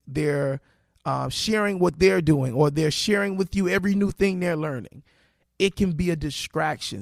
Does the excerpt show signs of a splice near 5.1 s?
no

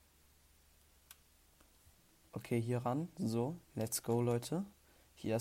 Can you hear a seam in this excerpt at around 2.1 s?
no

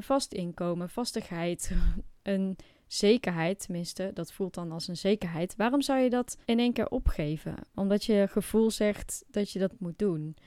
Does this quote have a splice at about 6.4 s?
yes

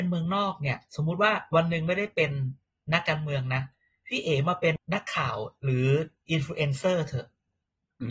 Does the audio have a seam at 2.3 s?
no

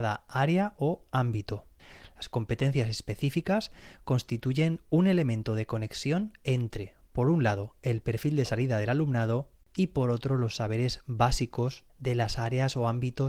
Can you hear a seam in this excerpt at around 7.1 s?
no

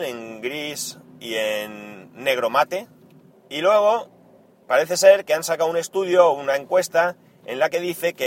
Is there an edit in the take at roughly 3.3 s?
yes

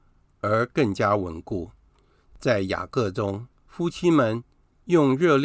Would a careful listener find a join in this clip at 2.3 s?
yes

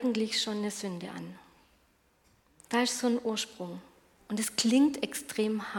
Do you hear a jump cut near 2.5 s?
no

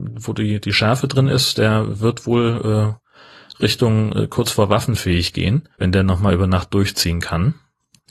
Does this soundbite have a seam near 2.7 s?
no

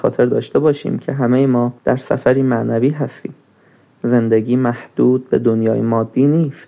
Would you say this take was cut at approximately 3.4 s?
no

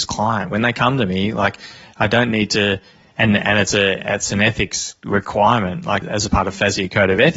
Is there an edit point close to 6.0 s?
yes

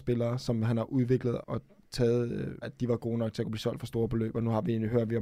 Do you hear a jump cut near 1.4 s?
yes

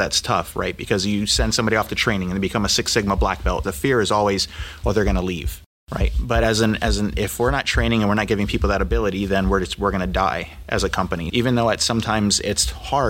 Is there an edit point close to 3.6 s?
yes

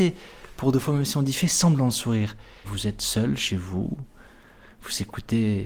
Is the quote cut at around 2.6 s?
yes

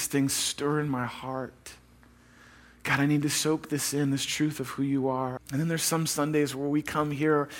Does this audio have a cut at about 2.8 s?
no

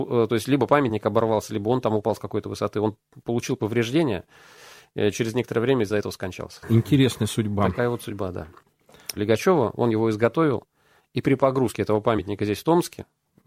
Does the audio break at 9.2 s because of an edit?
yes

